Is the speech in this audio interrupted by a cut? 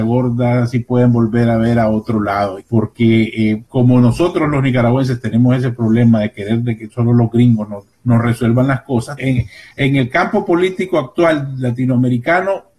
yes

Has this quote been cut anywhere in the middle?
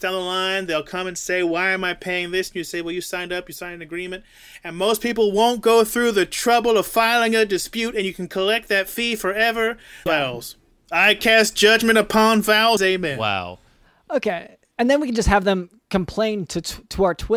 yes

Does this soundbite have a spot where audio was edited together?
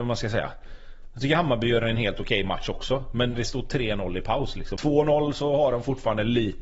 yes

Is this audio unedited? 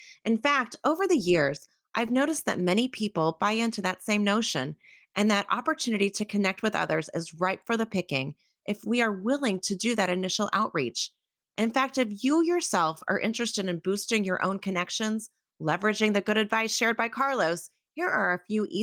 yes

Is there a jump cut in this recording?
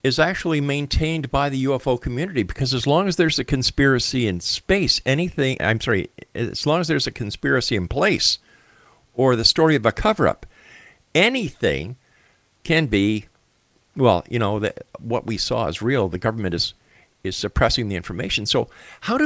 yes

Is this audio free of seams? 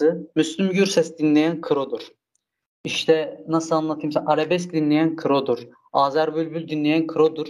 yes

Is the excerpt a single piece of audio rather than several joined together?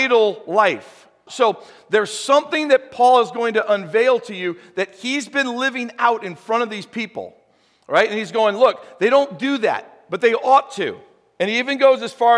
no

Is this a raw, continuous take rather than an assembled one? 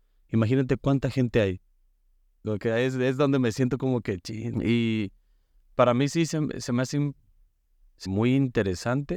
no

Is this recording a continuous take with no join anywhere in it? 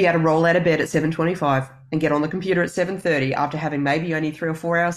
yes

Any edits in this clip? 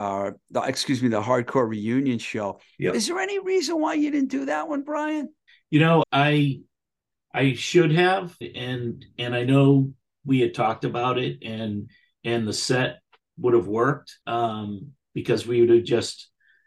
yes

